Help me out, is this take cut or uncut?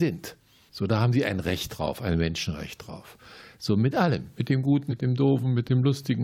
cut